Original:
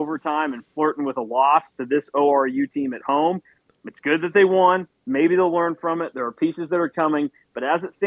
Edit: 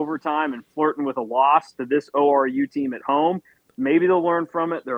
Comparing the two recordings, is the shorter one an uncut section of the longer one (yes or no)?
no